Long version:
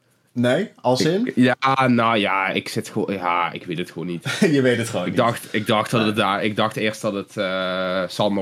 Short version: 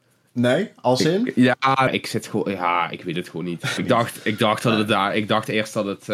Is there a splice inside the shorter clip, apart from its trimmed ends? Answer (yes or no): yes